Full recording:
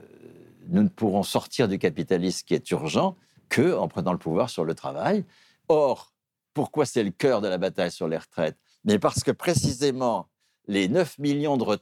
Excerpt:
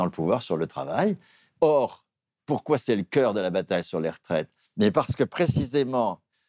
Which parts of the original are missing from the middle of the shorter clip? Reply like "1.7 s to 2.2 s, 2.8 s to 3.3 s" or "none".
none